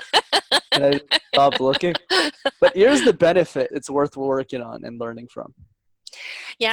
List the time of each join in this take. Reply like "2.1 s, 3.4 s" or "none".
3.7 s